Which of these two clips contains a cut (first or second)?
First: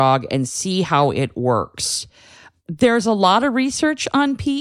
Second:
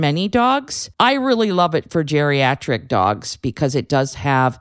second